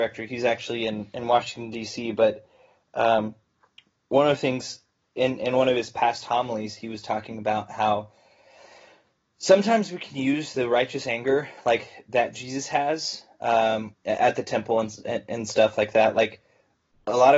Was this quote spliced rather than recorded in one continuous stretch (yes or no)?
yes